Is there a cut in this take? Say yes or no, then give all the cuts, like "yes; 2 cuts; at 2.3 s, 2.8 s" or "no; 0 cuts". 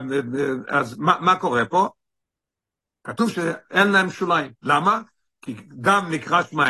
no; 0 cuts